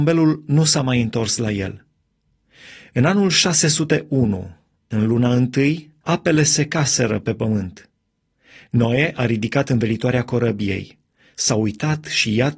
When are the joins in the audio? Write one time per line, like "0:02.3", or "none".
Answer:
0:06.0